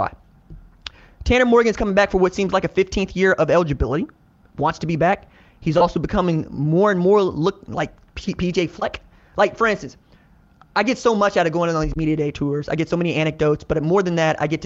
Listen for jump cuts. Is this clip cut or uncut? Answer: uncut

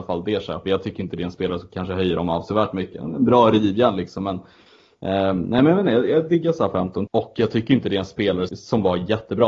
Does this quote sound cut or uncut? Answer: cut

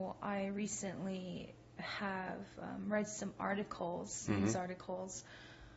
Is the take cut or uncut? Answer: uncut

